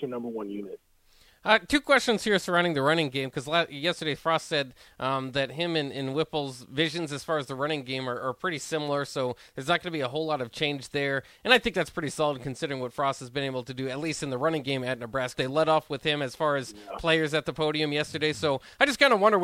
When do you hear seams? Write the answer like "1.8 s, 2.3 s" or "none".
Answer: 15.3 s